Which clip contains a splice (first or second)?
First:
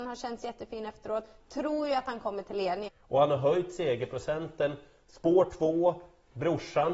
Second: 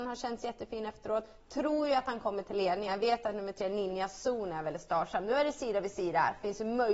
first